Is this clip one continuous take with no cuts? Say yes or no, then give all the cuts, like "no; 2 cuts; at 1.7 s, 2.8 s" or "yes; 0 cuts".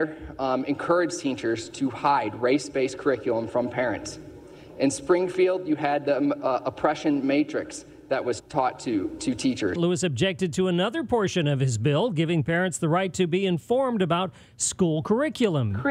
no; 2 cuts; at 8.4 s, 9.8 s